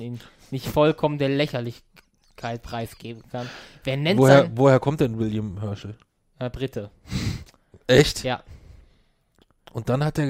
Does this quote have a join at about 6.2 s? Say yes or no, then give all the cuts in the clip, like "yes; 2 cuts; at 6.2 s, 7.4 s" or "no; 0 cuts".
no; 0 cuts